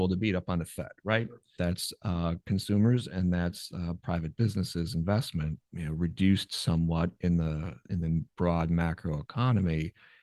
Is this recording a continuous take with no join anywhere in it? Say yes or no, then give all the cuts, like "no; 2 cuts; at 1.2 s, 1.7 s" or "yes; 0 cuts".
no; 2 cuts; at 1.6 s, 5.6 s